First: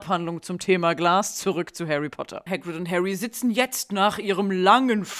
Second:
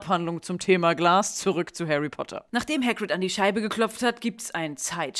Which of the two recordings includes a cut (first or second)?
first